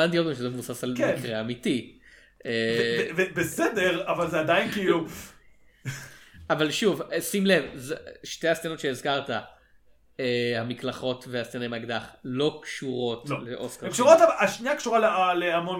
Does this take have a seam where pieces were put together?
no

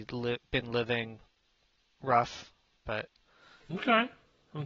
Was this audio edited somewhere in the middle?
no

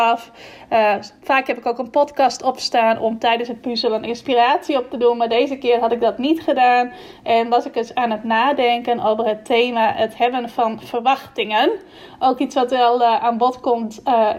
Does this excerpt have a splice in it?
no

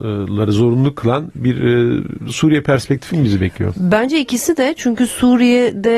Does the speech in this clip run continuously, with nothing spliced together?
yes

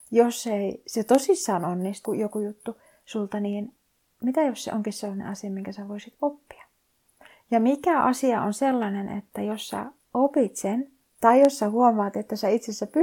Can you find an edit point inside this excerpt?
yes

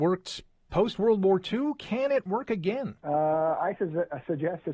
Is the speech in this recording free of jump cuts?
no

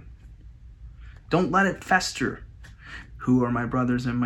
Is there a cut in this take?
yes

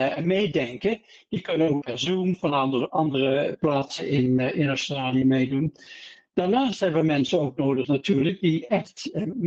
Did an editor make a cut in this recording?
no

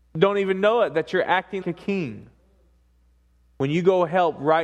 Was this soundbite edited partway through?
yes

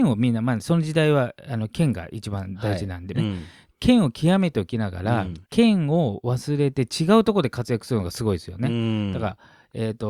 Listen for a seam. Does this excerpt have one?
yes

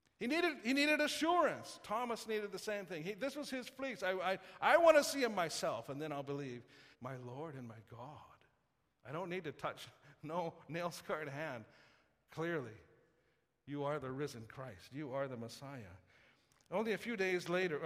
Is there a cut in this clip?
yes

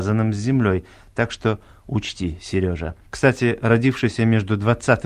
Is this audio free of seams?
no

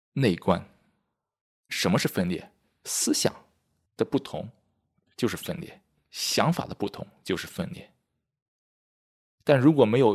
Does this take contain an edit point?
yes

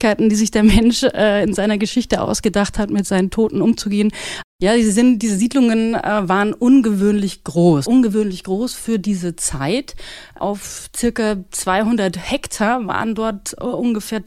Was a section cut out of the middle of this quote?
yes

